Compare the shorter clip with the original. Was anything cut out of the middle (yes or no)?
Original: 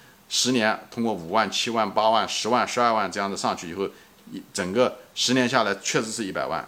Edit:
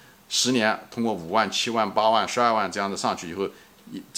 yes